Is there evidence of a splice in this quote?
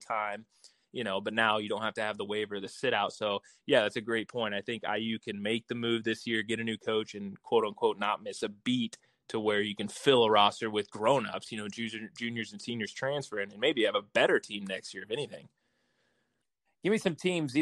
no; 0 cuts

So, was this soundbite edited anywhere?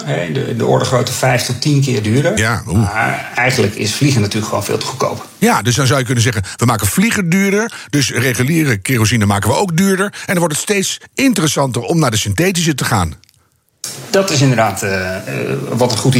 no; 0 cuts

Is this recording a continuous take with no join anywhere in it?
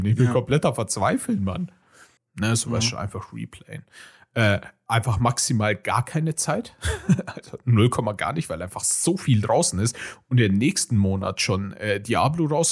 no; 1 cut; at 2.2 s

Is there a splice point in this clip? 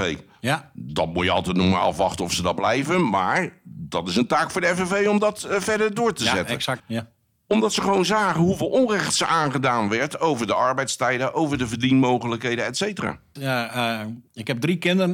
yes; 2 cuts; at 6.8 s, 13.4 s

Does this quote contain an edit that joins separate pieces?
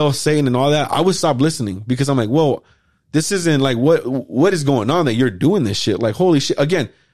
no; 0 cuts

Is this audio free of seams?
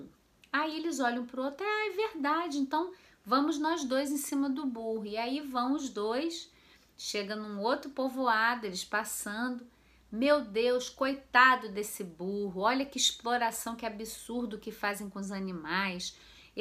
yes; 0 cuts

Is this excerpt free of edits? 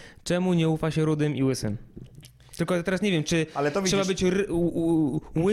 yes; 0 cuts

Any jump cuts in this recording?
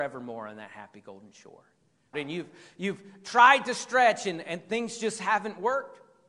yes; 1 cut; at 2.1 s

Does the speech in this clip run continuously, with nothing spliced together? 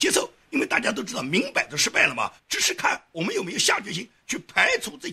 no; 1 cut; at 2.4 s

